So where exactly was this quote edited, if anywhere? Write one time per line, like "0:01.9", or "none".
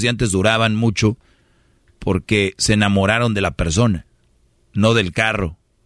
0:04.6

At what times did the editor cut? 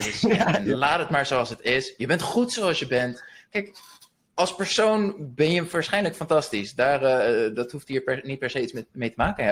none

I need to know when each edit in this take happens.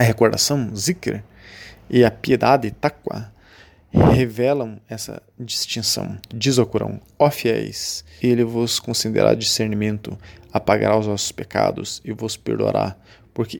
0:06.3
0:08.2

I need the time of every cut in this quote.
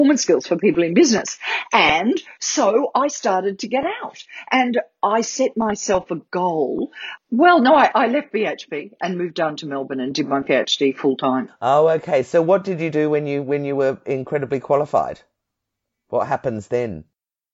0:07.2

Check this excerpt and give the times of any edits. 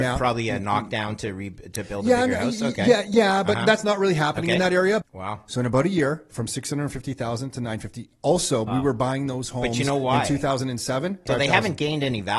0:05.0
0:08.7
0:11.3

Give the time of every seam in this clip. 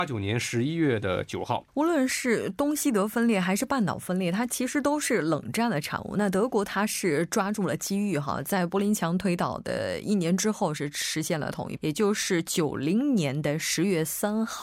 0:01.7
0:11.8

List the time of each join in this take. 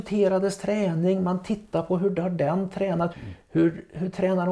0:03.1

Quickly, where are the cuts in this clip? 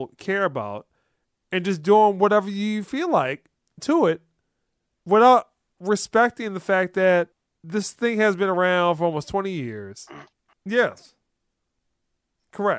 0:10.5

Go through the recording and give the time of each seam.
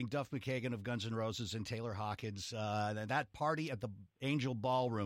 none

